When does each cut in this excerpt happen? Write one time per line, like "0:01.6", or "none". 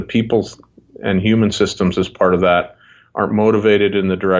none